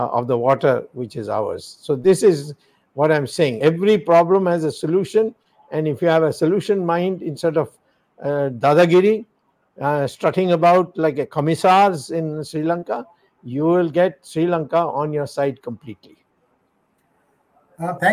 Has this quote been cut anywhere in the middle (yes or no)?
no